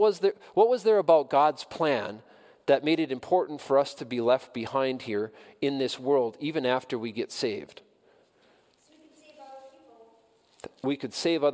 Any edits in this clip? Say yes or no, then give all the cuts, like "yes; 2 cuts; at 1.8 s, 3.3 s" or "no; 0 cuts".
no; 0 cuts